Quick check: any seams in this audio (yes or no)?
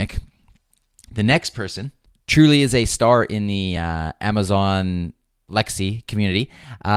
no